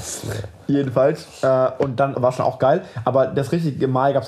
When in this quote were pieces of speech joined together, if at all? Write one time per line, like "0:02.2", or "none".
0:02.1